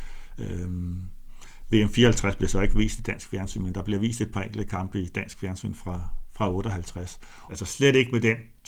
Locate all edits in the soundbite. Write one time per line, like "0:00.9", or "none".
0:07.5